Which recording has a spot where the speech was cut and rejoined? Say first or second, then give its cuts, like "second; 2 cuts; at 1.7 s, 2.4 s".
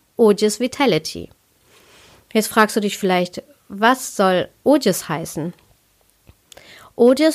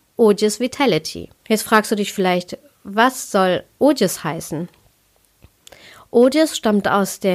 second; 1 cut; at 1.4 s